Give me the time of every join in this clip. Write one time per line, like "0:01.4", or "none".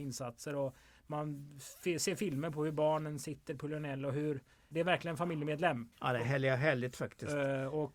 0:04.7
0:05.9